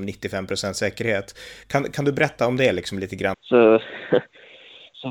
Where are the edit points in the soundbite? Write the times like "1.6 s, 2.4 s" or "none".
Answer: 1.6 s, 3.3 s